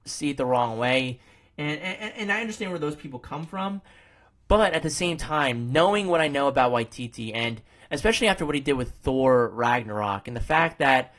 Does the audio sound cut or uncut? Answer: uncut